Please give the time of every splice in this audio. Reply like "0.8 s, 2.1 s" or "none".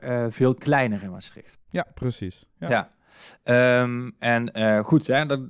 none